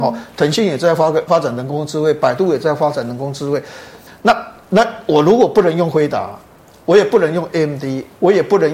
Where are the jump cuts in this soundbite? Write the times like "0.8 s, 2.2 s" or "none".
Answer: 1.3 s, 4.1 s